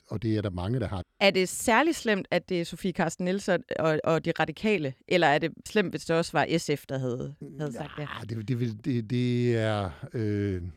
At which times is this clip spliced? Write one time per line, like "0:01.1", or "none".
0:01.0
0:05.7